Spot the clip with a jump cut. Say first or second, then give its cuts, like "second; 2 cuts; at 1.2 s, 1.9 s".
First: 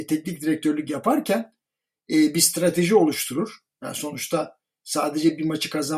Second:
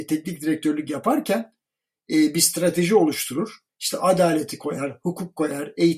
second; 1 cut; at 3.7 s